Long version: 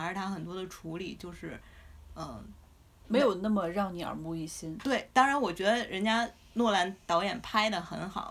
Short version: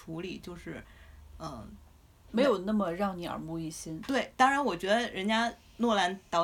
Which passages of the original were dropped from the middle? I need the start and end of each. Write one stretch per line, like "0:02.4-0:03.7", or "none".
none